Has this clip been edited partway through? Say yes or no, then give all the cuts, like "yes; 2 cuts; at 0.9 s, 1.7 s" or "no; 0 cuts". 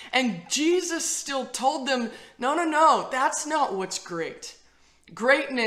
no; 0 cuts